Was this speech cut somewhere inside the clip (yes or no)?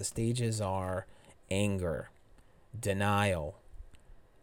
no